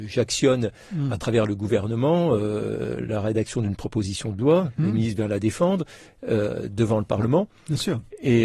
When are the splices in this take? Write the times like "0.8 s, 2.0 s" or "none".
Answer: none

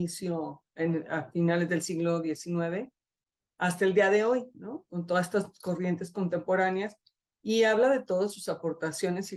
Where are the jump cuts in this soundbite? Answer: none

